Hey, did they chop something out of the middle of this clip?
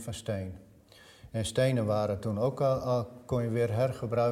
no; 0 cuts

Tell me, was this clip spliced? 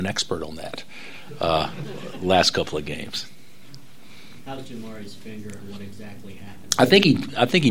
no; 0 cuts

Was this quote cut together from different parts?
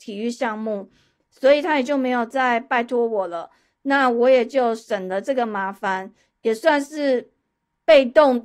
no; 0 cuts

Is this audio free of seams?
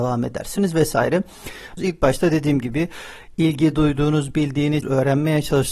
no; 2 cuts; at 1.8 s, 4.8 s

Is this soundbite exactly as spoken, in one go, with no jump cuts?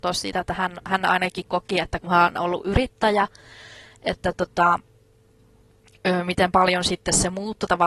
yes; 0 cuts

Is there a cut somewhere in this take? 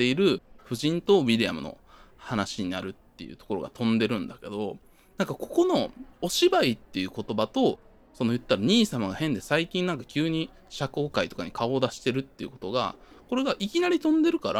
no; 0 cuts

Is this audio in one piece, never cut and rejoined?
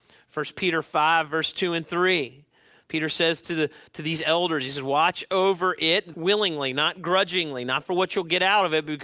no; 1 cut; at 6.1 s

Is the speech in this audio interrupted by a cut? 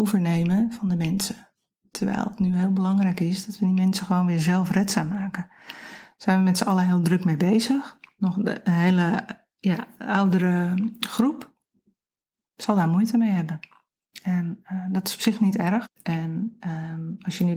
yes; 2 cuts; at 8.2 s, 15.8 s

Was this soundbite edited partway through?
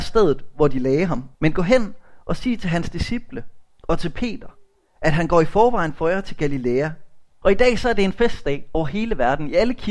yes; 2 cuts; at 1.3 s, 7.4 s

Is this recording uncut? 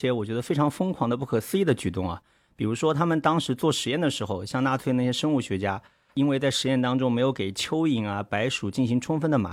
yes; 0 cuts

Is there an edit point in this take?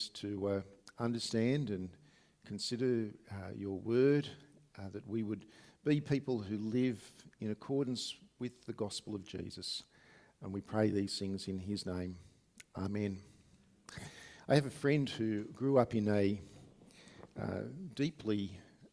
no; 0 cuts

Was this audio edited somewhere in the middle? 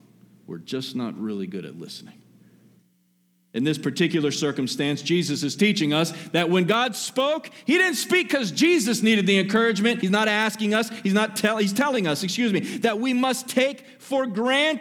yes; 1 cut; at 10.0 s

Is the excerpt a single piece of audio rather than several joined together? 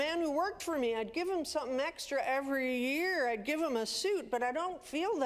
yes; 0 cuts

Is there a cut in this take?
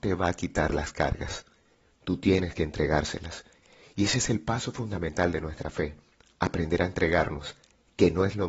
no; 0 cuts

